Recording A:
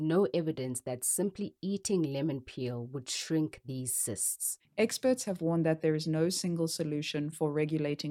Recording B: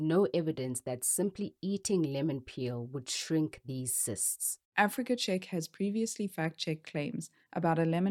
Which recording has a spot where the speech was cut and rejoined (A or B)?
A